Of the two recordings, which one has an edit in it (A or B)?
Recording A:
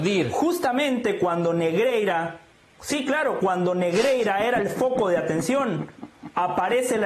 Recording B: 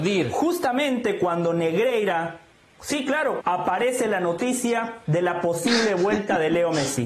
B